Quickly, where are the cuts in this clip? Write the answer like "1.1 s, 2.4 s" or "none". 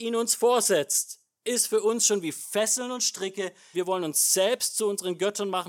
3.7 s